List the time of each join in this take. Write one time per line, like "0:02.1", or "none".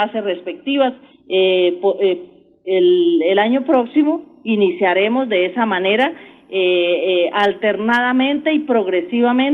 0:01.1